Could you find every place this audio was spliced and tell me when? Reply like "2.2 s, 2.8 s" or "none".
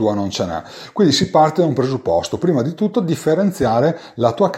none